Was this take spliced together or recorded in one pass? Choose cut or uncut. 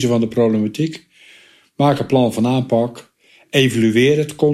uncut